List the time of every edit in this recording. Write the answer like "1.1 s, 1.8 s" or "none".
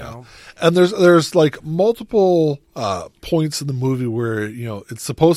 2.7 s